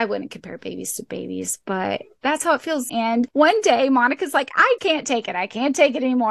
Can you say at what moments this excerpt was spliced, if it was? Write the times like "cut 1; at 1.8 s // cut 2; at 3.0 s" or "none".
cut 1; at 2.9 s // cut 2; at 4.8 s